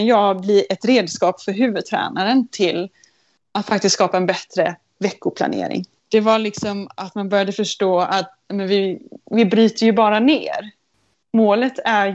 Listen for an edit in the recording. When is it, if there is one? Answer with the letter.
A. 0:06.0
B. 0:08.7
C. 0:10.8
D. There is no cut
A